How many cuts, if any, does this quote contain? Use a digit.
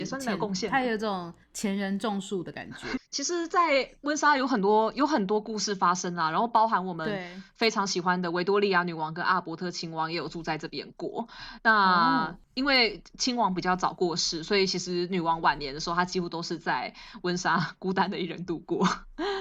2